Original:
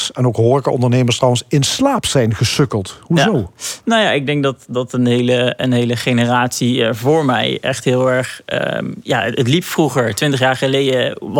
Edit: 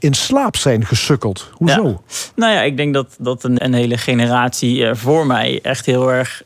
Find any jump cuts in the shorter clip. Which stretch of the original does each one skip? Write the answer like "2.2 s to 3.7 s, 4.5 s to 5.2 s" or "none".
5.1 s to 5.6 s